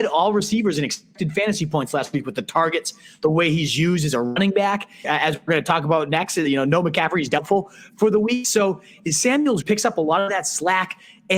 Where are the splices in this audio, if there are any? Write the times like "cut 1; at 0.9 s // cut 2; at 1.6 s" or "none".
cut 1; at 5.0 s // cut 2; at 9.6 s

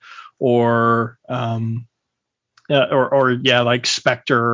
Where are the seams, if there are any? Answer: none

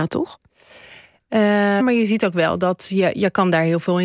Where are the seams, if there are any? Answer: cut 1; at 1.8 s

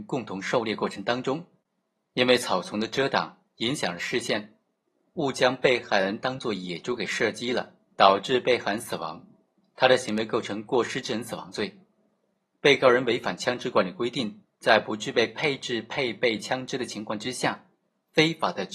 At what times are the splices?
none

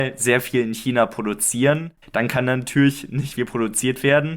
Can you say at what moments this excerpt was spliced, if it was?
cut 1; at 2.0 s // cut 2; at 3.4 s

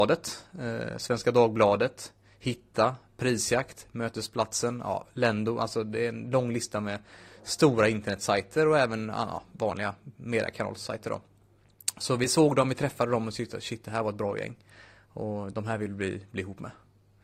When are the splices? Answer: none

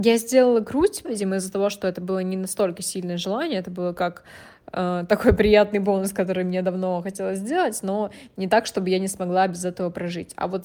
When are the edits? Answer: cut 1; at 1.0 s

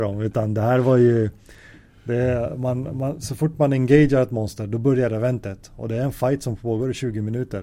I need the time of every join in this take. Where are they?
none

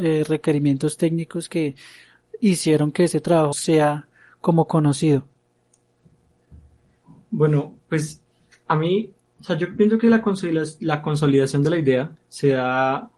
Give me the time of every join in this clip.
cut 1; at 3.5 s

